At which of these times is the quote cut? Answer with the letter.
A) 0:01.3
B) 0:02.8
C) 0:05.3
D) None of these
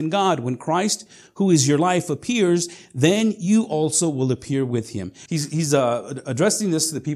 C